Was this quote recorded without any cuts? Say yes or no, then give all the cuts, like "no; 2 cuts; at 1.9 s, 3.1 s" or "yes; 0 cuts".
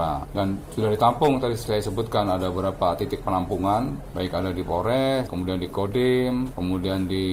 yes; 0 cuts